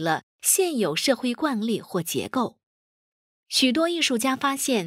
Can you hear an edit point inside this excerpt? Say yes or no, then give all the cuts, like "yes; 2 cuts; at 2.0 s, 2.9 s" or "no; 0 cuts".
no; 0 cuts